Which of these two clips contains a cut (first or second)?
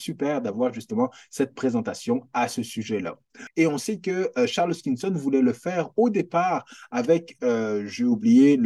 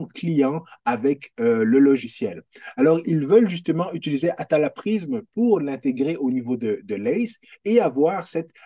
first